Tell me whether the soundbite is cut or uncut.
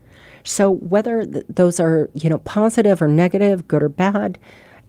uncut